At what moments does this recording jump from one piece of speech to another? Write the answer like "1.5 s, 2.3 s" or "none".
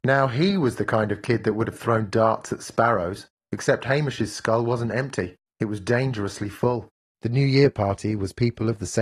7.1 s